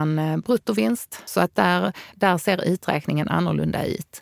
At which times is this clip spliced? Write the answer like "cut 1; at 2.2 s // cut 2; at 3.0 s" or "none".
none